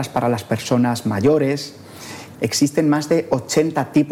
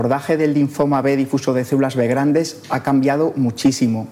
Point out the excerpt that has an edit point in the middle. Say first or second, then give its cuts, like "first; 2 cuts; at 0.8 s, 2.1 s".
first; 1 cut; at 2.3 s